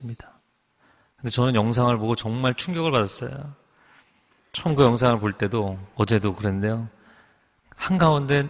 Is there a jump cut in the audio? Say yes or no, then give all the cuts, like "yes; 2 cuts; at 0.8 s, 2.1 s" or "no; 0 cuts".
no; 0 cuts